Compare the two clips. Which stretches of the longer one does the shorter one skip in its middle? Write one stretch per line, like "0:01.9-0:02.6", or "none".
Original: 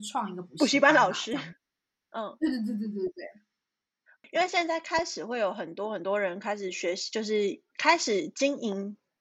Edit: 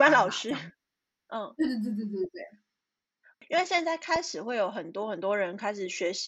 none